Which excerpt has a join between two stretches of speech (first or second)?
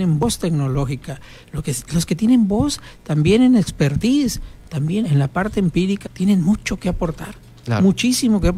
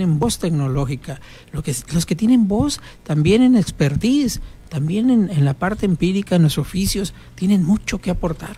first